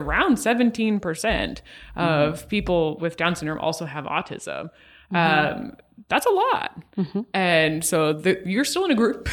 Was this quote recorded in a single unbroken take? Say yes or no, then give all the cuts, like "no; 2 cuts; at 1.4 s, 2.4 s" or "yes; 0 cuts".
yes; 0 cuts